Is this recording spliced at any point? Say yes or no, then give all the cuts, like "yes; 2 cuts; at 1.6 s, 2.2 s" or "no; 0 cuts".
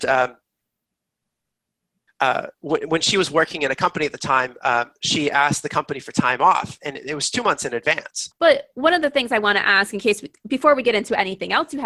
yes; 1 cut; at 8.3 s